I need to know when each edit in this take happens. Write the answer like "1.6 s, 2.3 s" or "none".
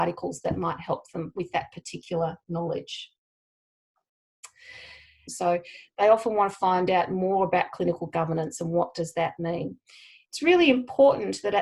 5.3 s